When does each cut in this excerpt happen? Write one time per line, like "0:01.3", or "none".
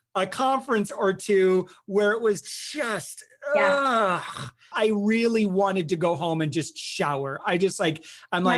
0:04.7